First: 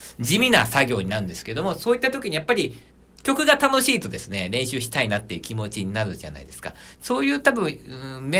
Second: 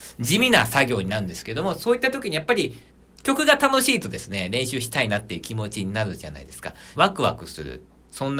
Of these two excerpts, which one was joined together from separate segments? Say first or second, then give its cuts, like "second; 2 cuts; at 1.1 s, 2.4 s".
second; 1 cut; at 6.9 s